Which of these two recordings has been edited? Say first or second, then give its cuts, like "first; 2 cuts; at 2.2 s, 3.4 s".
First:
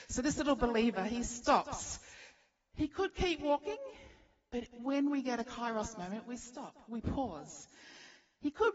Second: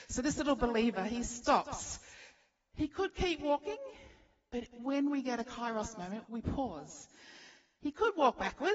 second; 1 cut; at 6.2 s